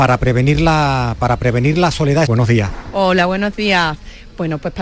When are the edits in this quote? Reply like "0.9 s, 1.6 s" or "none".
2.3 s